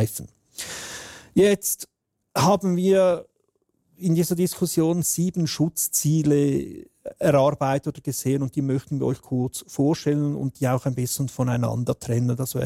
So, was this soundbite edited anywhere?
no; 0 cuts

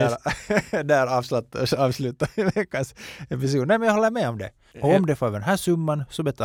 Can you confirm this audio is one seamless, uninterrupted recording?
no; 1 cut; at 4.7 s

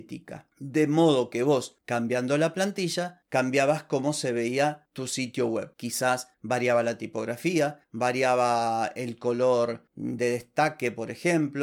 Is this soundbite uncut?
no; 1 cut; at 5.7 s

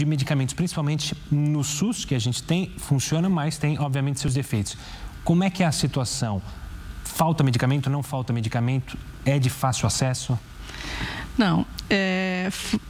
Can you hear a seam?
no; 0 cuts

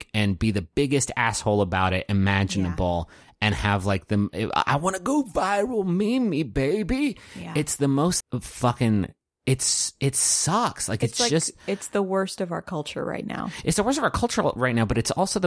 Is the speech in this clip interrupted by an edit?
yes; 1 cut; at 8.2 s

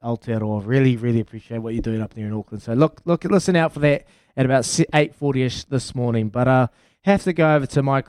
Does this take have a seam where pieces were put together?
no; 0 cuts

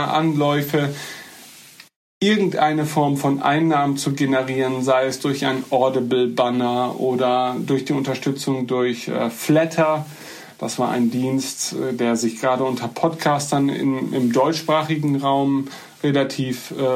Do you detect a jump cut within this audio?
no; 0 cuts

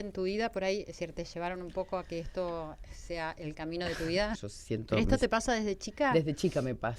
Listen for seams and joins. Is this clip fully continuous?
no; 1 cut; at 4.4 s

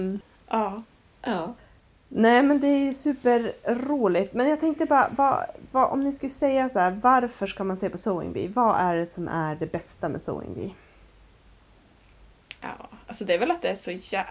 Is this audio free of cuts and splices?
yes; 0 cuts

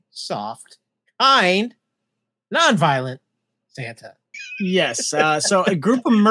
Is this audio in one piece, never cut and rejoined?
no; 1 cut; at 4.3 s

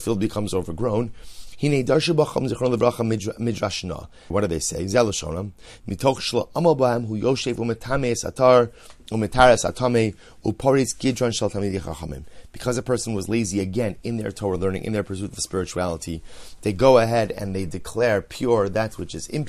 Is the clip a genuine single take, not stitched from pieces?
no; 2 cuts; at 4.3 s, 5.8 s

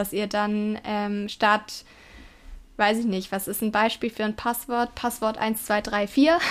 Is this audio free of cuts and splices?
yes; 0 cuts

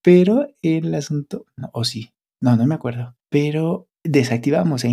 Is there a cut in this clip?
no; 0 cuts

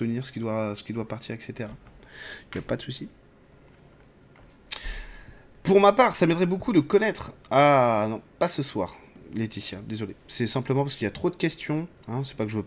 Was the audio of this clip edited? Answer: no; 0 cuts

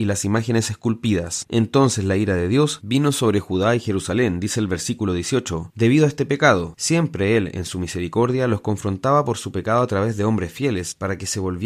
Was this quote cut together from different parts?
yes; 1 cut; at 6.7 s

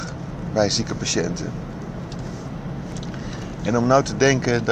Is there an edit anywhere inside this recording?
no; 0 cuts

